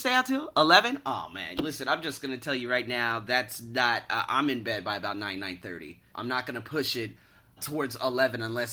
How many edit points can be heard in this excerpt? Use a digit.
2